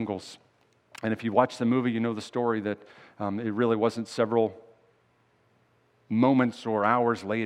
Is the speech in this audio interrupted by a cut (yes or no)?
no